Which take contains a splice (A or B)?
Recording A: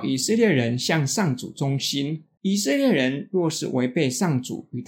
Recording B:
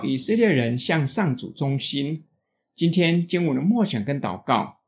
A